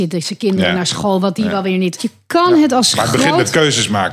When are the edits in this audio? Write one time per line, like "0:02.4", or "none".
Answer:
0:02.0